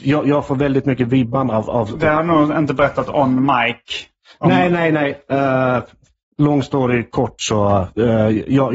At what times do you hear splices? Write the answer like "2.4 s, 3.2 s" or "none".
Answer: none